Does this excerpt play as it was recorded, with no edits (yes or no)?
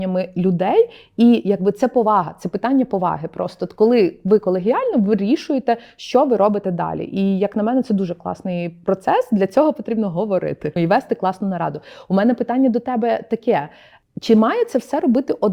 no